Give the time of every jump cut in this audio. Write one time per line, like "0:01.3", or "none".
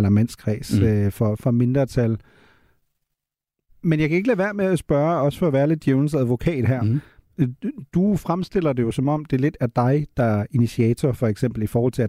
0:03.7